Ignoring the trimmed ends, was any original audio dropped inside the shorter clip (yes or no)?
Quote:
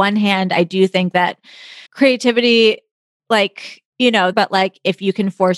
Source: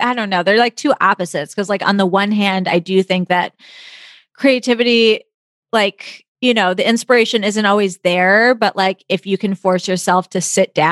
yes